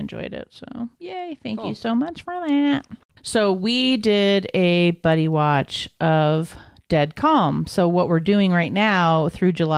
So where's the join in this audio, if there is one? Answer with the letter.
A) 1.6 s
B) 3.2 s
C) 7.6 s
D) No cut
B